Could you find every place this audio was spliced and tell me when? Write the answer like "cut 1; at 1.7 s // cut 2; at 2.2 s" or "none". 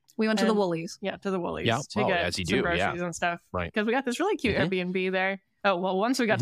none